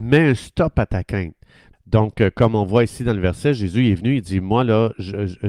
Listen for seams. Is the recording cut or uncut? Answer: cut